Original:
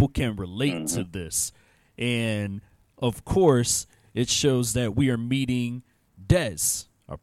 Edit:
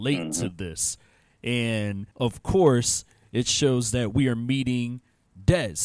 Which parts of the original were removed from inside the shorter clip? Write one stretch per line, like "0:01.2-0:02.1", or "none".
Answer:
0:02.7-0:02.9